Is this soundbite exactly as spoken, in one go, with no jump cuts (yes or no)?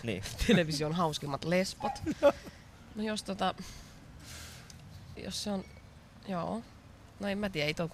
no